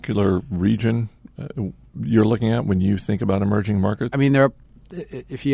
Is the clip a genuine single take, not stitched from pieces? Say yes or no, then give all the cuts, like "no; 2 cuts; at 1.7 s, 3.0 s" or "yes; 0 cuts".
no; 1 cut; at 4.1 s